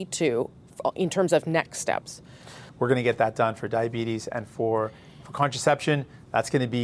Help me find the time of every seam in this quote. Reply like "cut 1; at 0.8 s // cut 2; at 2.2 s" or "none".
cut 1; at 2.7 s